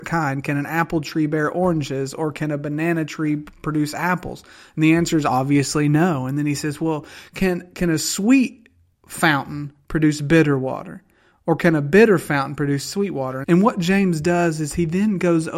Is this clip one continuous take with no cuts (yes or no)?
no